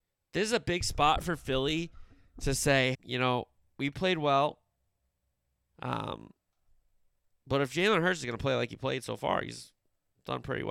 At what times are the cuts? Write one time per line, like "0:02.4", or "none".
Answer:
0:02.9
0:05.7